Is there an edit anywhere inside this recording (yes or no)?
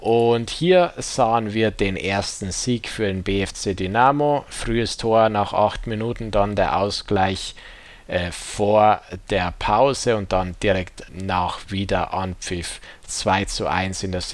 yes